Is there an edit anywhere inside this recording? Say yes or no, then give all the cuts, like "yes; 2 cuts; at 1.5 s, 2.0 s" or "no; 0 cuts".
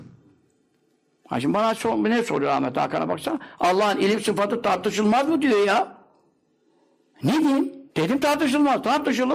yes; 1 cut; at 7.9 s